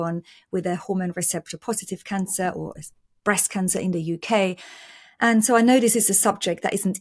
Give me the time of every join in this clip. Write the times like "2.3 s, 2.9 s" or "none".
none